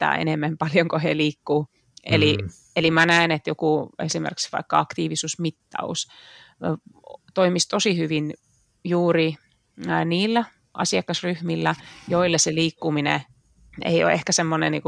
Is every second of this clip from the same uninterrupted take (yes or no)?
yes